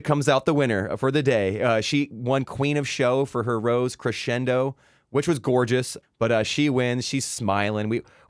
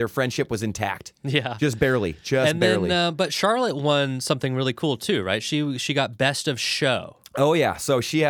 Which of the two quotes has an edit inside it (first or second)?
first